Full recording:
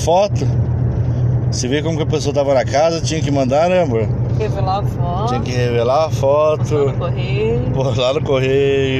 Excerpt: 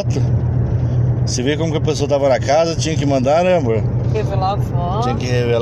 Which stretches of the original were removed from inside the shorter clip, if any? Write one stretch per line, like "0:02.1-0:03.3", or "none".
none